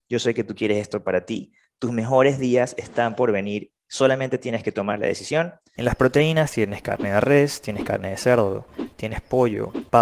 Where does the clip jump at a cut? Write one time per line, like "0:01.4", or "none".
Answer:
0:05.7